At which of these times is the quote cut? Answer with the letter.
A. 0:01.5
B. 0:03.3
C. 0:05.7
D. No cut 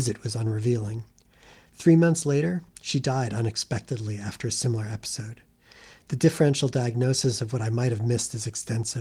D